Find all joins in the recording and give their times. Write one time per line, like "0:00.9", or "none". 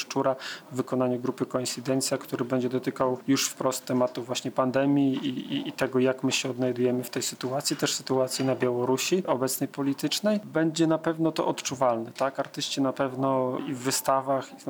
none